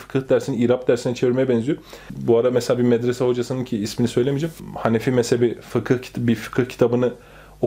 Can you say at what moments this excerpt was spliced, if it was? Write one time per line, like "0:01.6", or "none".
none